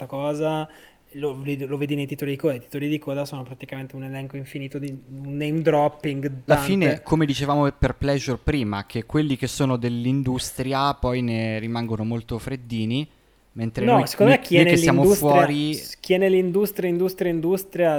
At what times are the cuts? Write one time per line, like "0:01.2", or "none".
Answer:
0:06.5